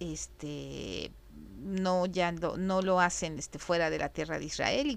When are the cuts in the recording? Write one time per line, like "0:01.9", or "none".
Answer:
none